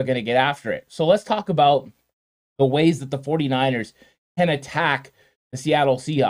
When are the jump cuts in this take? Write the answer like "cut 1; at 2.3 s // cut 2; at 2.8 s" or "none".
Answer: none